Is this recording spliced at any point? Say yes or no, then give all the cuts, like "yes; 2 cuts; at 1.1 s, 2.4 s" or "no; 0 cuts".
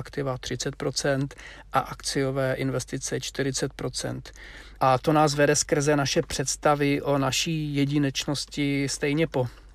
yes; 1 cut; at 4.8 s